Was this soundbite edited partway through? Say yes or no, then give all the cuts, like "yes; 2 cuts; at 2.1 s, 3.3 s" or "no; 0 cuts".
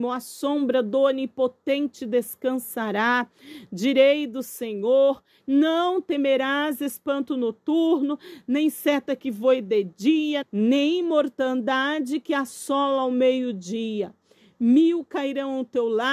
yes; 2 cuts; at 5.4 s, 10.4 s